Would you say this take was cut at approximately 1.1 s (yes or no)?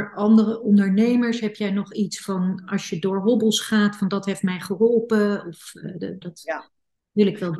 no